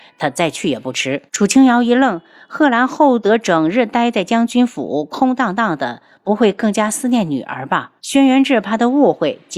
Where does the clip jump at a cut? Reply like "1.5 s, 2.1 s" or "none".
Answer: 1.3 s, 8.0 s